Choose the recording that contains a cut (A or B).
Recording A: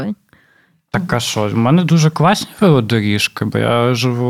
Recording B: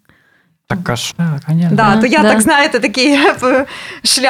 B